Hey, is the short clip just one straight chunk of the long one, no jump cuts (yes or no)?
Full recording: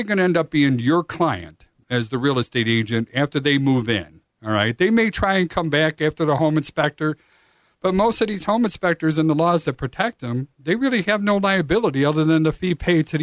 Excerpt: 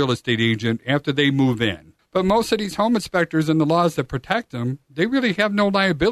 no